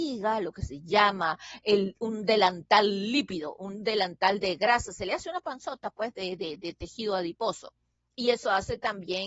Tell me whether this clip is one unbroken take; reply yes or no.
yes